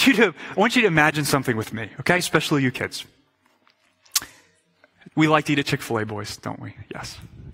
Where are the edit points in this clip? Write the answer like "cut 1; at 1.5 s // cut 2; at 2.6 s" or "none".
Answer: cut 1; at 5.1 s